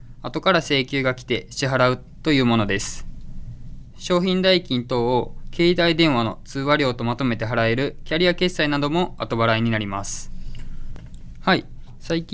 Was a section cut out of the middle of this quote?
yes; 1 cut; at 11.3 s

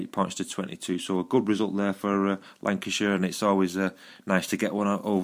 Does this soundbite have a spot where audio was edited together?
no; 0 cuts

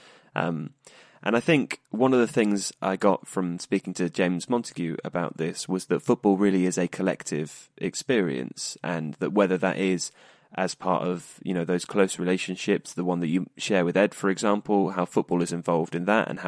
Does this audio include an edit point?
no; 0 cuts

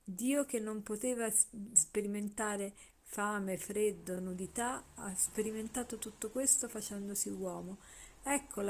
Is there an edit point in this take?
no; 0 cuts

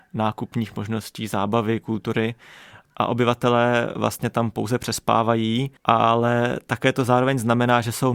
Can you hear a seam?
yes; 1 cut; at 5.8 s

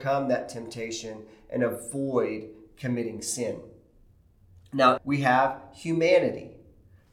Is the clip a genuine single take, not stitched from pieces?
no; 1 cut; at 5.0 s

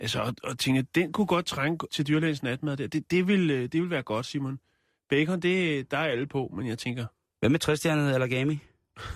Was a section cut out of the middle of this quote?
yes; 1 cut; at 1.9 s

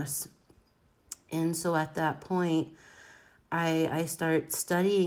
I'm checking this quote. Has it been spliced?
no; 0 cuts

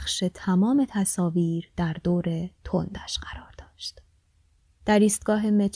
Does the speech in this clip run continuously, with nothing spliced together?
no; 1 cut; at 4.8 s

